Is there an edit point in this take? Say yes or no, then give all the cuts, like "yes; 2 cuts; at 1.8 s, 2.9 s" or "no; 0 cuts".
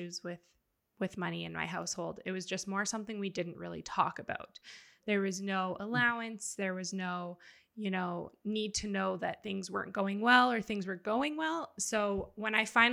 no; 0 cuts